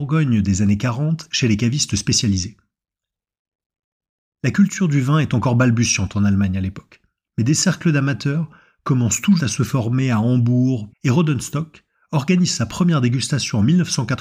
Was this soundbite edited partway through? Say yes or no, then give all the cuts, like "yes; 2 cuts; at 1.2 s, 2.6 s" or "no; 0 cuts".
yes; 2 cuts; at 9.4 s, 10.9 s